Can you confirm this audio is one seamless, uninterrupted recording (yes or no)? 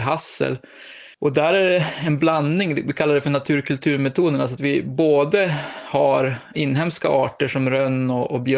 no